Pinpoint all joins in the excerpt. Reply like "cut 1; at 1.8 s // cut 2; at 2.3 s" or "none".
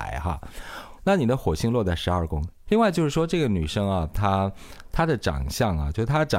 cut 1; at 1.0 s // cut 2; at 2.7 s